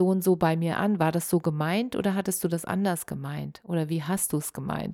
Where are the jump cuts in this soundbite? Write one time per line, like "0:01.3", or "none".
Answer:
none